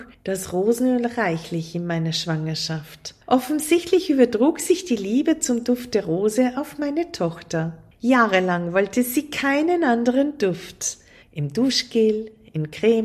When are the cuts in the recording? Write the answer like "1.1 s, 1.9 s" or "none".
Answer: 11.2 s